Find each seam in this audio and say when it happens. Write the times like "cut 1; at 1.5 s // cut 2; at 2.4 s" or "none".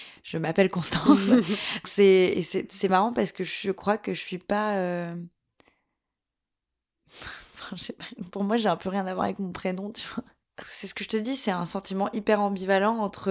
cut 1; at 1.8 s // cut 2; at 10.6 s